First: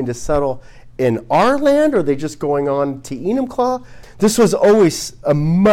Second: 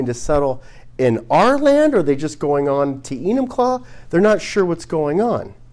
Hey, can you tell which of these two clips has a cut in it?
first; 1 cut; at 4.0 s

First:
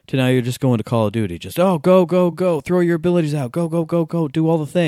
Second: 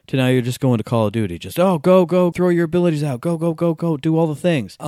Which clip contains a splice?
second; 1 cut; at 2.3 s

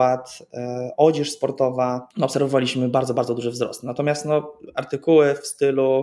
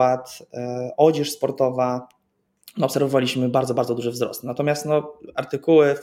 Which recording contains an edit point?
first; 1 cut; at 2.1 s

